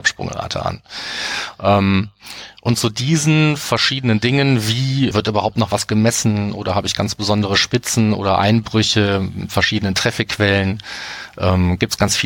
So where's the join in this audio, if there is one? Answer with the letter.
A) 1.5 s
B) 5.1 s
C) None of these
B